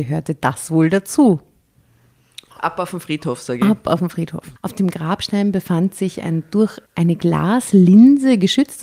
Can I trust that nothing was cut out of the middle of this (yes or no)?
no